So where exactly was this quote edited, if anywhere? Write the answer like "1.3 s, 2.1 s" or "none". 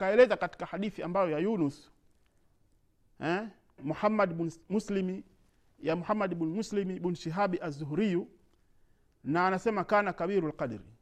3.8 s